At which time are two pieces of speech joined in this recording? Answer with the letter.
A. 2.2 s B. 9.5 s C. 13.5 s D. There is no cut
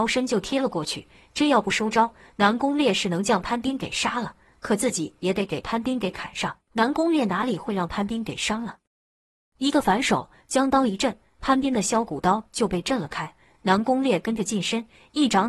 D